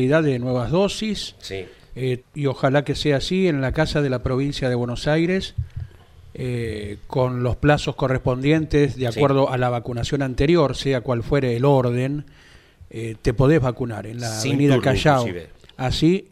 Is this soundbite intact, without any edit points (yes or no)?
no